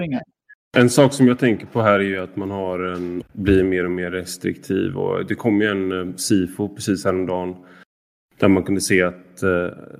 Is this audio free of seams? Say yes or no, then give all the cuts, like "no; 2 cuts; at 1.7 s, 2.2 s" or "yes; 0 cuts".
no; 1 cut; at 3.2 s